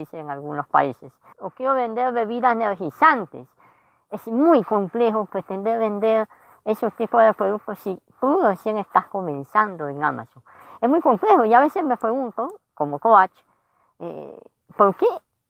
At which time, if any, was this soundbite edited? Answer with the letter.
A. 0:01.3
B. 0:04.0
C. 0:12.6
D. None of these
A